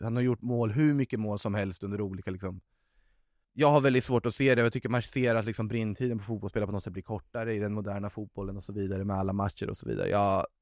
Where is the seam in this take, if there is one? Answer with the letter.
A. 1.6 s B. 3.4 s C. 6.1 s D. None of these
B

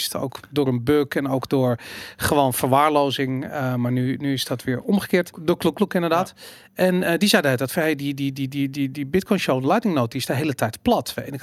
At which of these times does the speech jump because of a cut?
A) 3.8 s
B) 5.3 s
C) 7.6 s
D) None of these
B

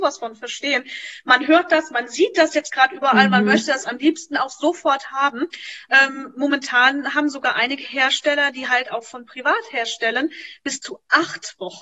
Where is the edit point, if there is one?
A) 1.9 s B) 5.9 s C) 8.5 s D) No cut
B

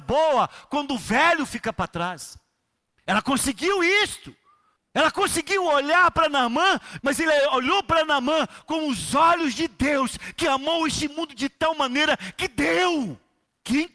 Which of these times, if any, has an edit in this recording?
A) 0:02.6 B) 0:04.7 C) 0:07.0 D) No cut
C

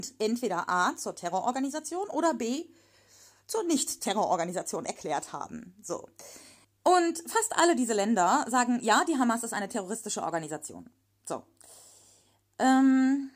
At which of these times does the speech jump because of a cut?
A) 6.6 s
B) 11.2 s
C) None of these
A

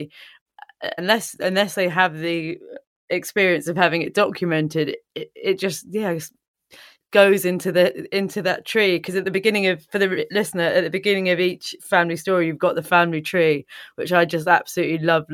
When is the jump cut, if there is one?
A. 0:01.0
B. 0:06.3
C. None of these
A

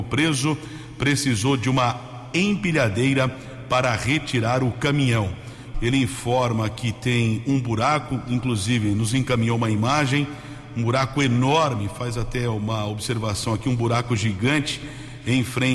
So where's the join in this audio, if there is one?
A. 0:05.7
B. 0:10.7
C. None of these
A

